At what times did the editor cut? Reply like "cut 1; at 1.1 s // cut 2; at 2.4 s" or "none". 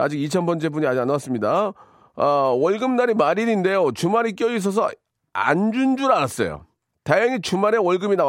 none